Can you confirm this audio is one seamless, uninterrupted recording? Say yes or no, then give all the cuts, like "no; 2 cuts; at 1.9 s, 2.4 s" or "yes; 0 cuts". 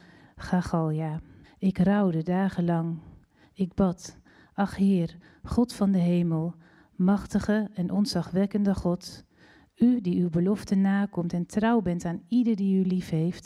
no; 2 cuts; at 1.4 s, 3.4 s